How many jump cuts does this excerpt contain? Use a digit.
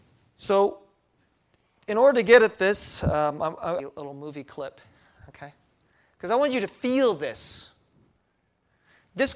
1